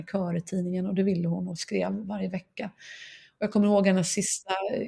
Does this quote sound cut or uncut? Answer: uncut